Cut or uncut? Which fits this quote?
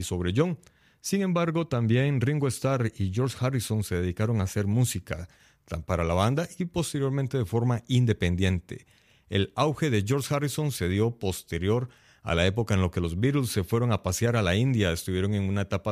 uncut